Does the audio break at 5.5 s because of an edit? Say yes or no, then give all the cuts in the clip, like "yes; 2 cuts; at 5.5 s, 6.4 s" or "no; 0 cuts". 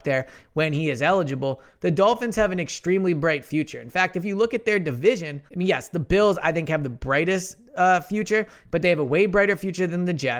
yes; 1 cut; at 5.5 s